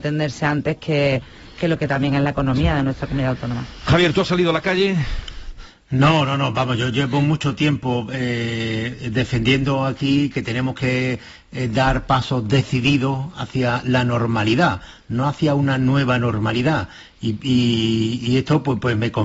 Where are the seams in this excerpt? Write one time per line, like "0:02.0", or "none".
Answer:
none